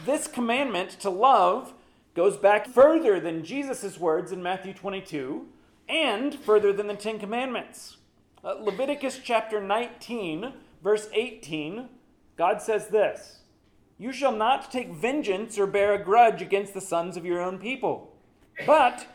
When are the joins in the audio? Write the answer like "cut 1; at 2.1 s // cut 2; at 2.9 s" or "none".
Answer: cut 1; at 2.6 s